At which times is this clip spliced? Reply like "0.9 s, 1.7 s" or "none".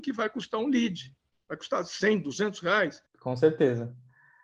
3.1 s